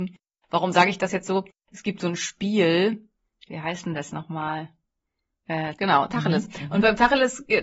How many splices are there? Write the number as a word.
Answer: two